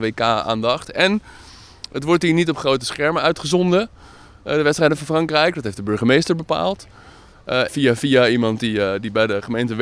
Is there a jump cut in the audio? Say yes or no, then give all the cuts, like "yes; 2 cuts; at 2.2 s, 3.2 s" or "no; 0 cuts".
yes; 1 cut; at 7.7 s